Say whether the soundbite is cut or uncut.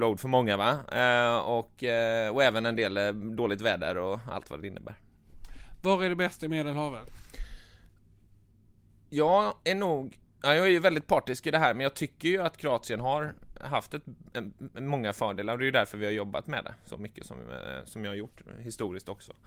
uncut